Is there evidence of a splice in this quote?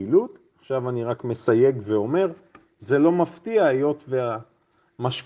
no; 0 cuts

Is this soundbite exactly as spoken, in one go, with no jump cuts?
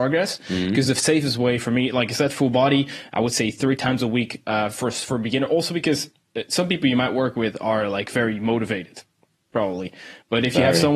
yes; 0 cuts

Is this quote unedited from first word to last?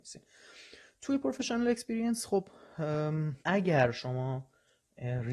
no; 1 cut; at 3.4 s

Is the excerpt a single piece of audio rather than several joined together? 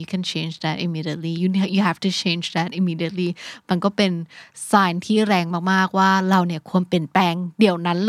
yes; 0 cuts

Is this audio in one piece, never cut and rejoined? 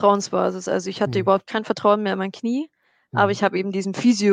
yes; 0 cuts

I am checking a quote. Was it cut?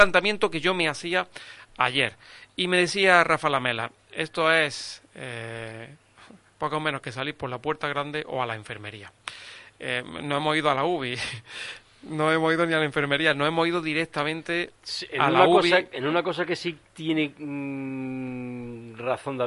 no; 0 cuts

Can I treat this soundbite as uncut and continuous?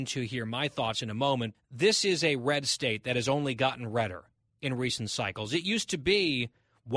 no; 1 cut; at 1.5 s

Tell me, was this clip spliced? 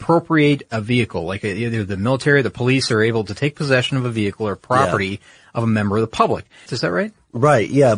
yes; 1 cut; at 6.7 s

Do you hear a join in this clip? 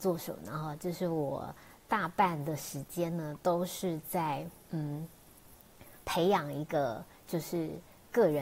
no; 0 cuts

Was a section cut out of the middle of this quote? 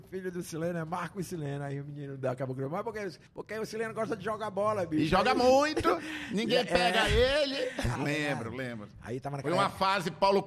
yes; 2 cuts; at 3.3 s, 8.0 s

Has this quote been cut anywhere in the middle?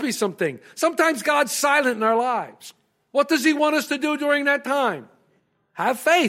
no; 0 cuts

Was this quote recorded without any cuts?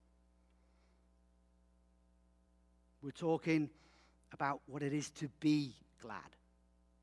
yes; 0 cuts

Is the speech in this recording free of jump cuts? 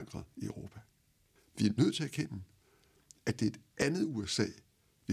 no; 1 cut; at 1.4 s

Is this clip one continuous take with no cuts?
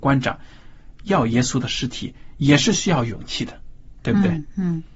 yes; 0 cuts

